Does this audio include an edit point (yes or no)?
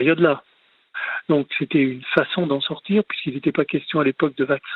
no